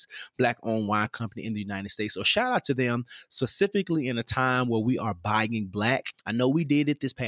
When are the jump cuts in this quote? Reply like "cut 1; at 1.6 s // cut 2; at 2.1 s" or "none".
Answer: cut 1; at 6.1 s

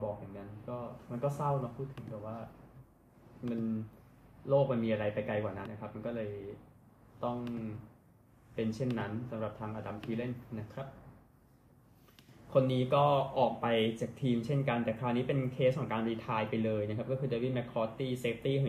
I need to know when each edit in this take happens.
cut 1; at 5.6 s

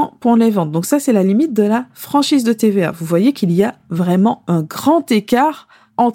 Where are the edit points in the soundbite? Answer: none

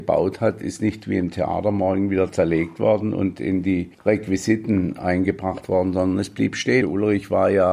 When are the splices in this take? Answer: cut 1; at 3.9 s // cut 2; at 6.8 s

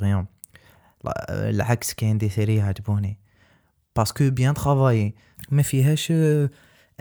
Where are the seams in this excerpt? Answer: none

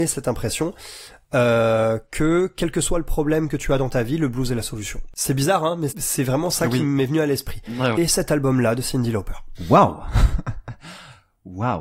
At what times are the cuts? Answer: cut 1; at 5.9 s // cut 2; at 7.9 s

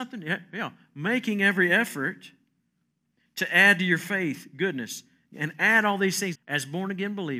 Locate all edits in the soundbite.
cut 1; at 6.3 s

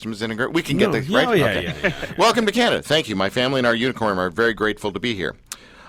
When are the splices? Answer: none

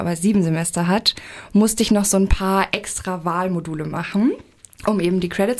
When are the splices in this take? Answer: none

